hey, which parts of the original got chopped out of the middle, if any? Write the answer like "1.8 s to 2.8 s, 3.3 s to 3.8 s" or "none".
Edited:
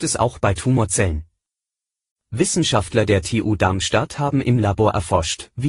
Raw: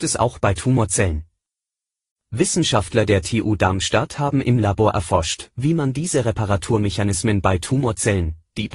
none